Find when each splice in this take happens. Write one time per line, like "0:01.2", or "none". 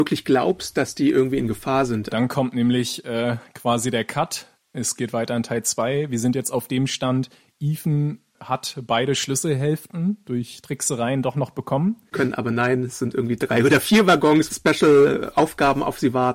0:02.1
0:12.1
0:14.5